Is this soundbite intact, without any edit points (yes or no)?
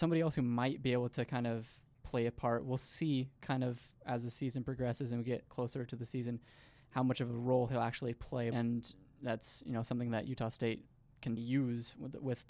no